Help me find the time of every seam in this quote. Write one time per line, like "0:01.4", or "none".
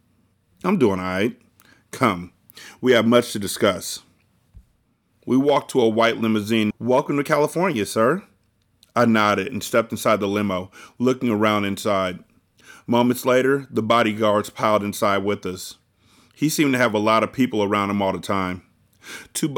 0:06.7